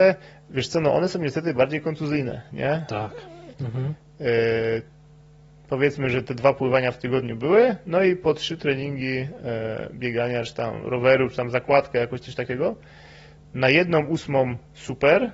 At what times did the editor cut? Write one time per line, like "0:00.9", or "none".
0:03.5